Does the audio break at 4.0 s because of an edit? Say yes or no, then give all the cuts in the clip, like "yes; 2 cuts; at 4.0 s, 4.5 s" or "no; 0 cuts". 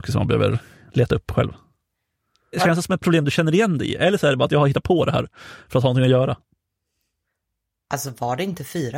no; 1 cut; at 2.5 s